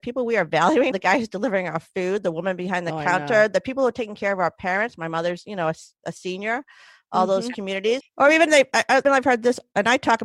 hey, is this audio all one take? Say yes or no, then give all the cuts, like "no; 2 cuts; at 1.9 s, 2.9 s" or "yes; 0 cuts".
no; 3 cuts; at 0.9 s, 8.0 s, 9.0 s